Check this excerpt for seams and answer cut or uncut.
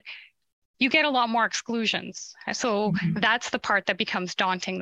uncut